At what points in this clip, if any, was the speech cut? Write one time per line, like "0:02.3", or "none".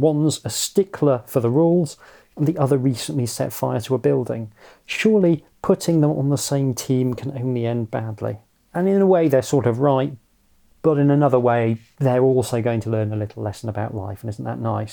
none